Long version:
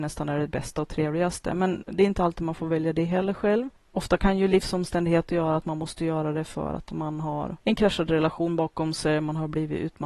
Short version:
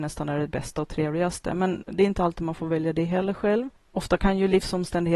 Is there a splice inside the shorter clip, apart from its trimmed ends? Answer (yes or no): no